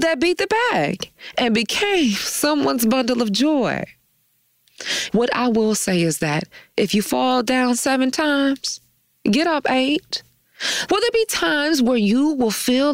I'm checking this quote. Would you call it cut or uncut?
cut